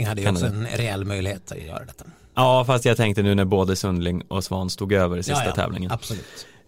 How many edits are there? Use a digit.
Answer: 0